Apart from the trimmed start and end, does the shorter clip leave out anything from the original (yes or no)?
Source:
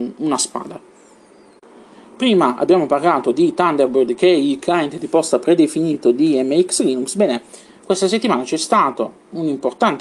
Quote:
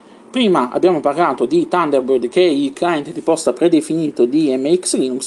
no